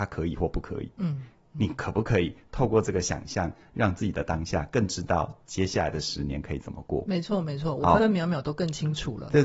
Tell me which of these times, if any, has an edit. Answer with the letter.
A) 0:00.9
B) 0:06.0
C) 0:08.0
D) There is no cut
C